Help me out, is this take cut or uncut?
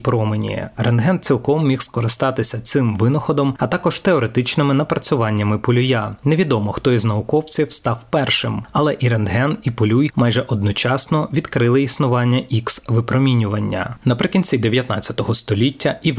uncut